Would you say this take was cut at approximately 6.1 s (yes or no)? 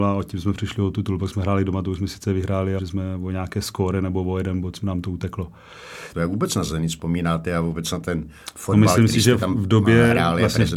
yes